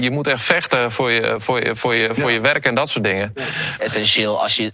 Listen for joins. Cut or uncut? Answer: cut